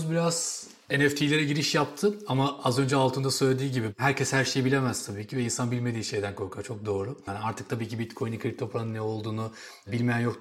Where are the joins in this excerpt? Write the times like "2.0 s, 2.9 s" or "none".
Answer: 7.3 s